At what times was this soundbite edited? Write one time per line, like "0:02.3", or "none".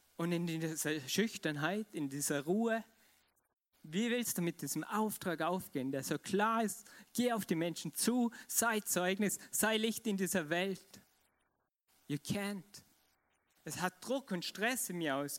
none

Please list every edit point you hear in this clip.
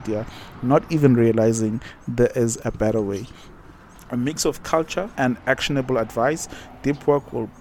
0:05.1

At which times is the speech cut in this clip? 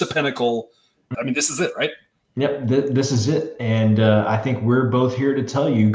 0:01.1

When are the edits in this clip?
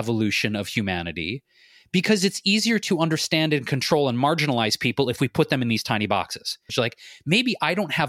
0:06.7

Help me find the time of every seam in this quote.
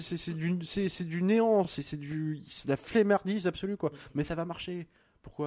none

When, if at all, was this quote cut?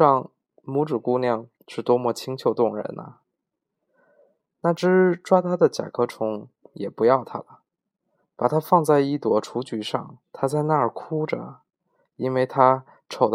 0:08.2
0:10.2

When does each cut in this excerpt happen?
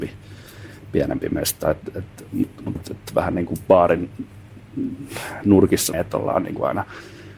0:02.8
0:05.9

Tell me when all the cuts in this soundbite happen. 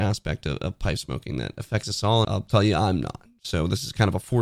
0:02.2

